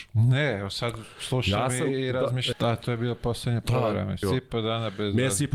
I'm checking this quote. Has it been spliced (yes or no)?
yes